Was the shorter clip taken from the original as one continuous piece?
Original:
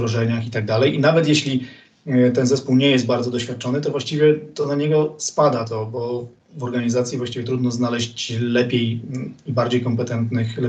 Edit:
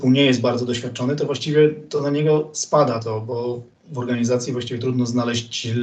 yes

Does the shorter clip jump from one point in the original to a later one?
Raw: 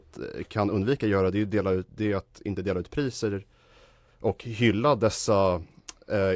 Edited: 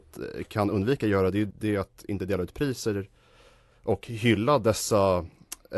yes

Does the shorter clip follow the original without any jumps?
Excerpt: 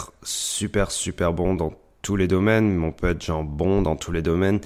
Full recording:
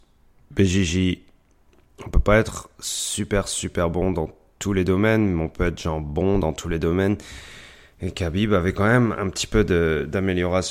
yes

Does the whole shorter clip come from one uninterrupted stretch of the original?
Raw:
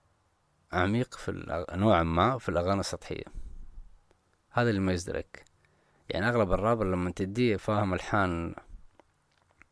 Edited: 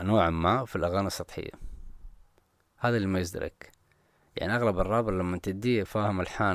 yes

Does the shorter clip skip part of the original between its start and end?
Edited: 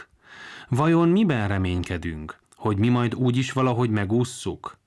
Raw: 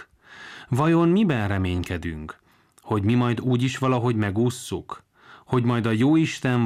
yes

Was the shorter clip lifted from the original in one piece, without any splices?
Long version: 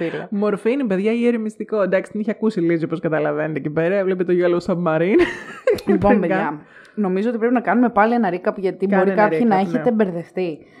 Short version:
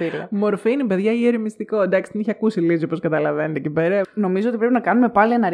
no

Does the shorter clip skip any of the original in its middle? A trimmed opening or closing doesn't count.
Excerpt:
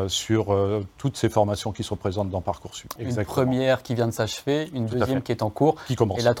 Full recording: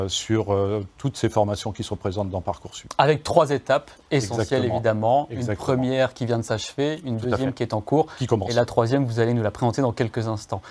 yes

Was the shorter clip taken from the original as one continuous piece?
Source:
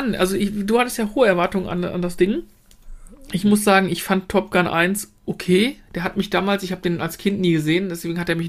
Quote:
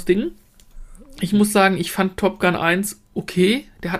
yes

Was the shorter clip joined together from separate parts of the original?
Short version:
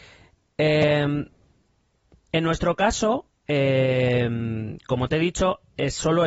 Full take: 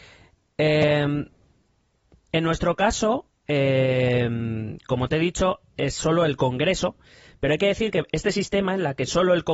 no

